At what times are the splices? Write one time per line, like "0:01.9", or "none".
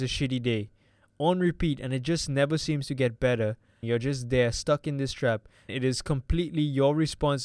0:03.8
0:05.7